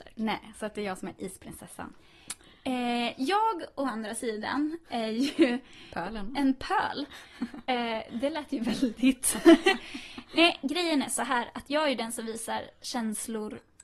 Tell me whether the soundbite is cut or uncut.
uncut